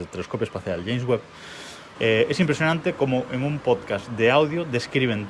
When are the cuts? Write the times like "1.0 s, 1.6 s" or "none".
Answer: 1.9 s

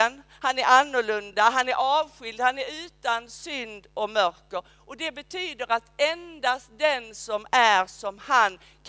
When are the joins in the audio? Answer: none

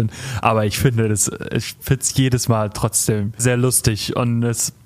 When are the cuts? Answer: 3.4 s

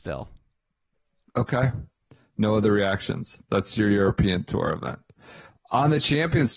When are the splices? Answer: none

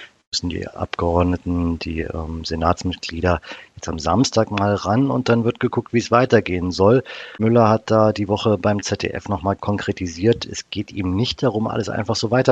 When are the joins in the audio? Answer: none

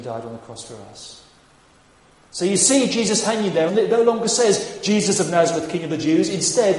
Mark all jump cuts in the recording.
3.7 s

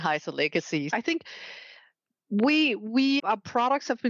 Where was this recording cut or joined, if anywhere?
0.9 s, 3.2 s

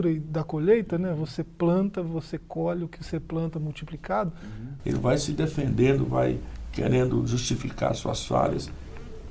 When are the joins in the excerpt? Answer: 4.8 s

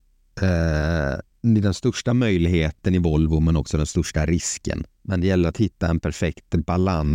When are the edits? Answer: 5.0 s

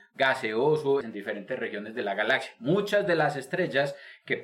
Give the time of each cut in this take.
1.0 s

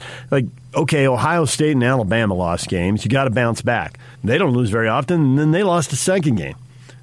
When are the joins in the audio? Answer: 4.2 s

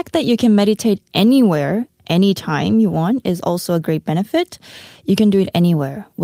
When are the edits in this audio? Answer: none

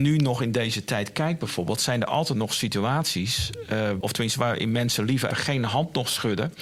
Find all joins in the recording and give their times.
4.0 s, 5.3 s

